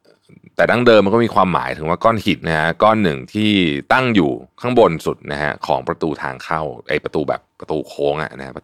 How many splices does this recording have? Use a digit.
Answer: 1